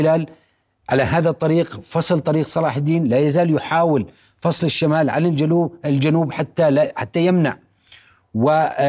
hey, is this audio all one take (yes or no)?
yes